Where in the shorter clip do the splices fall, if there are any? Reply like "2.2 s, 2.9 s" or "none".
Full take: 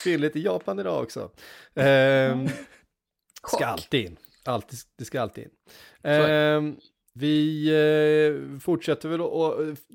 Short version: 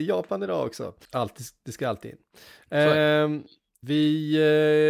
1.1 s